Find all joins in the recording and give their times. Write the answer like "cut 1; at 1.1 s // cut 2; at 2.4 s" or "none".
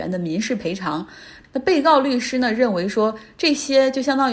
none